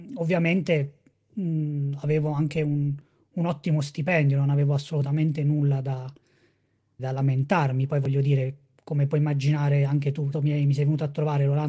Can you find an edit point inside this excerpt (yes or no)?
yes